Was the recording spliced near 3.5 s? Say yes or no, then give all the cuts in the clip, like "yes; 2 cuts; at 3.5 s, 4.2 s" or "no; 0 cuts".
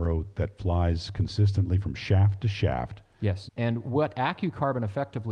yes; 1 cut; at 3.5 s